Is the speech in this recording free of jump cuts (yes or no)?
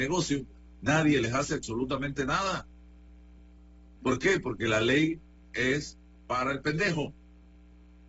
no